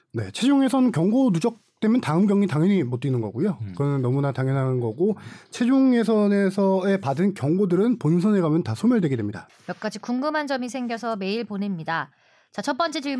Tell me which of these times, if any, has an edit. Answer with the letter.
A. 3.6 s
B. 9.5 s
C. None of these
B